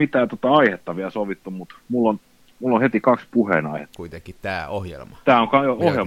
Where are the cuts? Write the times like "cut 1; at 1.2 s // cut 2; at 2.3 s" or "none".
cut 1; at 3.9 s